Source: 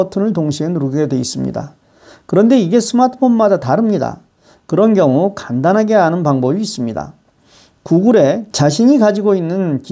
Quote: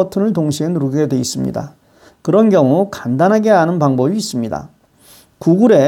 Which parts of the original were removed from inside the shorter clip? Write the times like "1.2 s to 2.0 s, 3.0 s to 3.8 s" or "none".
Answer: 2.1 s to 4.5 s